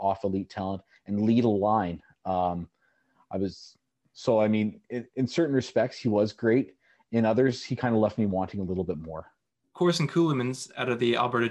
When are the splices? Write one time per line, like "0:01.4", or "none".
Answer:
none